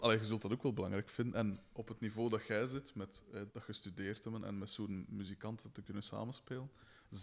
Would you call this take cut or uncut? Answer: cut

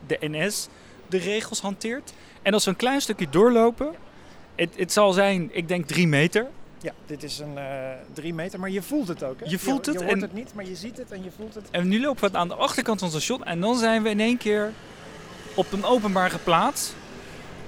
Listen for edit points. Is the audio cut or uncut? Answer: uncut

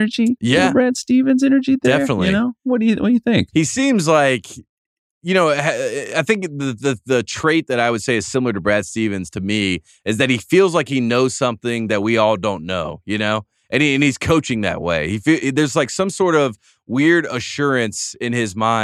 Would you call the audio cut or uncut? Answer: uncut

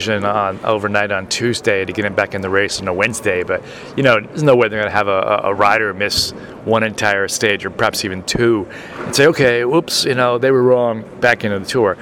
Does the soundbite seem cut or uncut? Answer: uncut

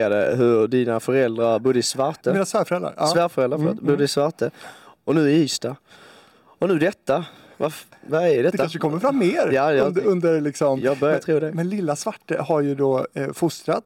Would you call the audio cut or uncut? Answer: uncut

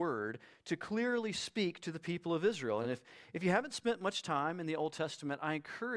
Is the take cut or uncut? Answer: uncut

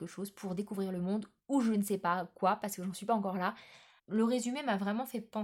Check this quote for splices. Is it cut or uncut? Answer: cut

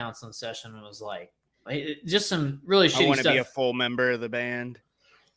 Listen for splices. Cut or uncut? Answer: cut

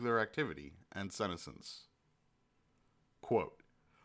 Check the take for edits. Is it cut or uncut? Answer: uncut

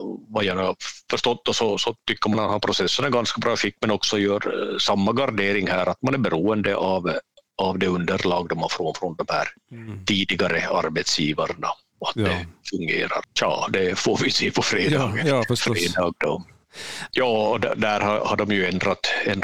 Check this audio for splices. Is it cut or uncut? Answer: cut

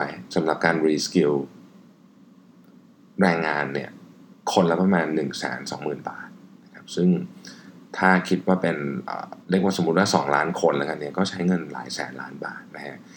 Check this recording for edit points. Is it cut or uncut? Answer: cut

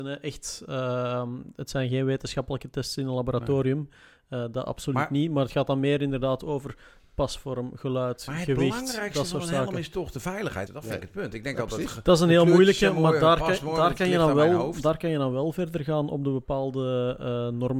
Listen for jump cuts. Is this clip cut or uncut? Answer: cut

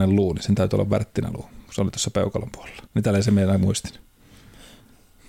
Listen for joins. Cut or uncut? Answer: cut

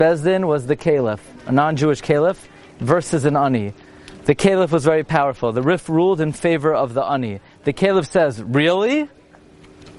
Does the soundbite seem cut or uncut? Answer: uncut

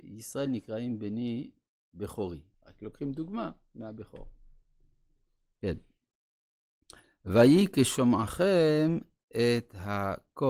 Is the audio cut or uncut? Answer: cut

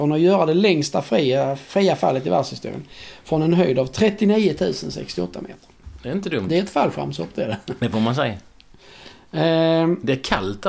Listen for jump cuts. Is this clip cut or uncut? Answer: uncut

